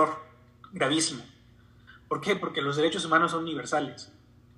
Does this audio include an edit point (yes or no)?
no